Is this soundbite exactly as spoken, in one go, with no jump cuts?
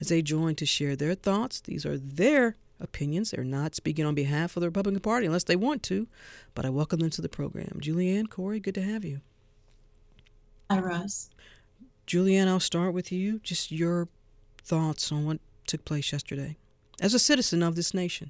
yes; 0 cuts

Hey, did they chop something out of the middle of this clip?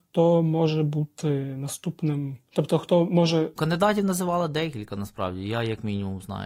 yes; 1 cut; at 3.5 s

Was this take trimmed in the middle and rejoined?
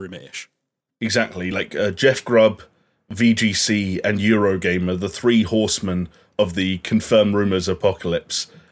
no; 0 cuts

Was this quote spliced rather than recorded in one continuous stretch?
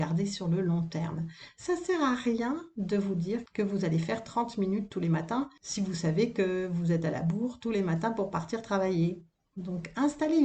no; 0 cuts

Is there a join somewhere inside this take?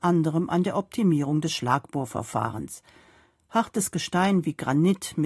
no; 0 cuts

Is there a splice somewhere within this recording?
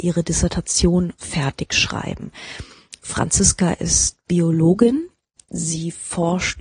yes; 1 cut; at 5.5 s

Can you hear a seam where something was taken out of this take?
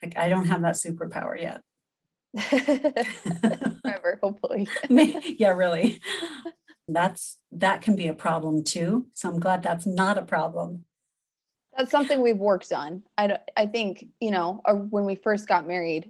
yes; 1 cut; at 6.9 s

